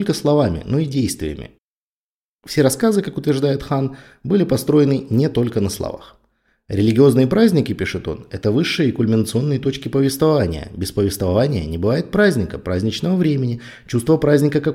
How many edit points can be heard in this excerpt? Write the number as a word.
zero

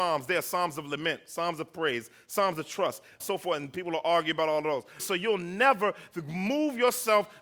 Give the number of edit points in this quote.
two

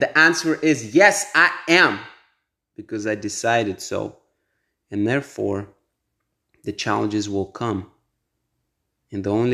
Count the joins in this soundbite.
zero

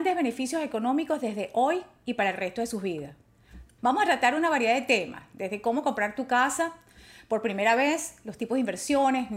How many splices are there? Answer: one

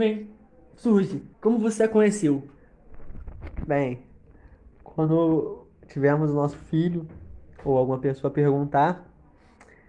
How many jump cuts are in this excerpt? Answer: one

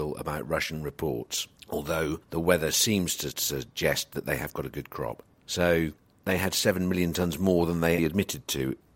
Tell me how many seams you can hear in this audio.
two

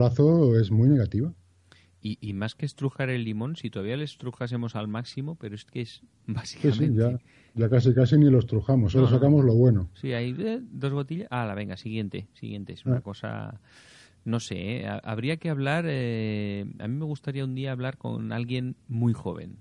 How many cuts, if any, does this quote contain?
one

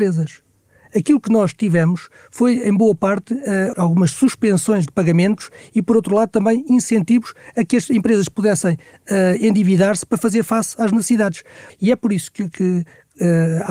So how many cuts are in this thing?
two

